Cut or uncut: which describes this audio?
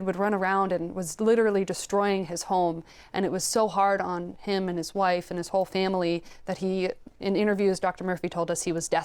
uncut